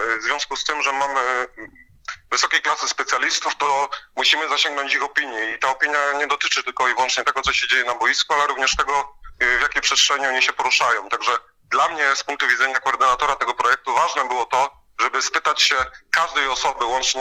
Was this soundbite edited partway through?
no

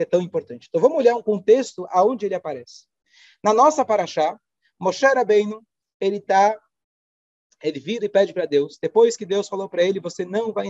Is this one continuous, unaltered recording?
yes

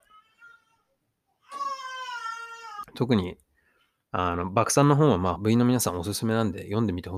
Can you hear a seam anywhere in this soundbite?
yes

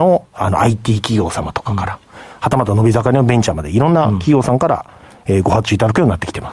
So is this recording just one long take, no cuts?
yes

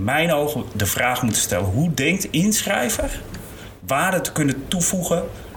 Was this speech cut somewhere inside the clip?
no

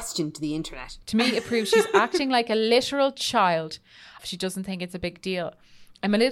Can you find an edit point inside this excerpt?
yes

